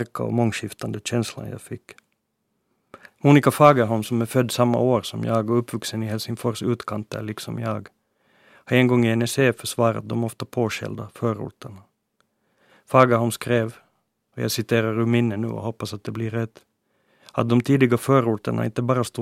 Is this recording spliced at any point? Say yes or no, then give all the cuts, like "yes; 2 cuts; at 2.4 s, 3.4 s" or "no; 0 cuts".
yes; 1 cut; at 3.1 s